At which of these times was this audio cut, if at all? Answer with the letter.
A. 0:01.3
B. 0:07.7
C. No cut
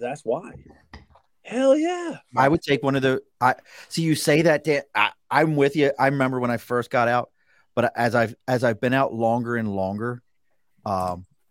A